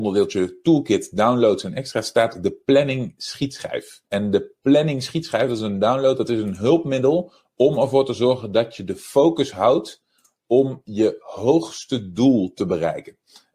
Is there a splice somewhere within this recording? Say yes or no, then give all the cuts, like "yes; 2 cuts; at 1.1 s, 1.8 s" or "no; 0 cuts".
yes; 1 cut; at 4.1 s